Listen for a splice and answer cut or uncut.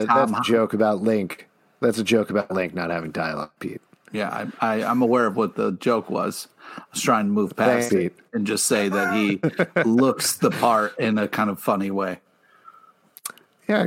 uncut